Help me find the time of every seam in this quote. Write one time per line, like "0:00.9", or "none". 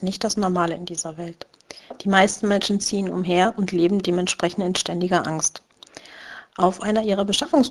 none